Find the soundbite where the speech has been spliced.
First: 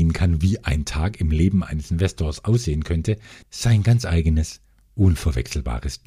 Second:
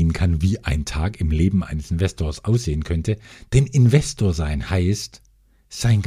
first; 1 cut; at 3.4 s

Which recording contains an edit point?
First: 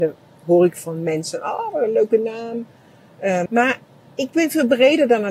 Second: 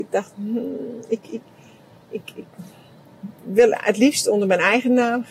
first; 1 cut; at 3.5 s

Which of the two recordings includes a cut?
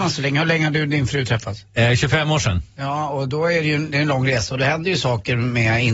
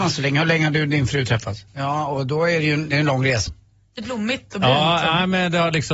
second; 2 cuts; at 1.7 s, 3.5 s

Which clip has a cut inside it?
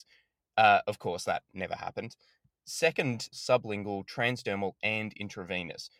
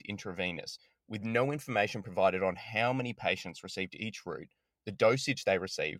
first; 1 cut; at 3.3 s

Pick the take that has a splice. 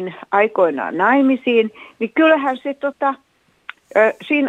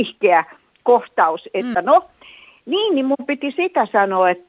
second; 1 cut; at 1.7 s

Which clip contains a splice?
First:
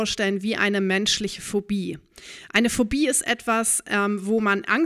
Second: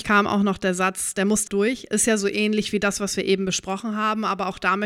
second; 1 cut; at 1.5 s

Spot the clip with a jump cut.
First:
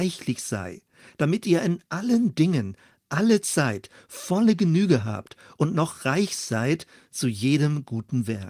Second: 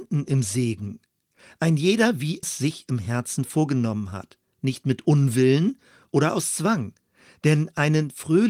second; 1 cut; at 2.4 s

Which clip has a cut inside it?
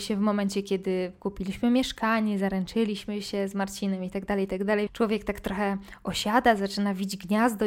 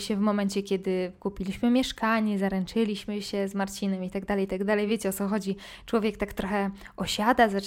first; 1 cut; at 4.9 s

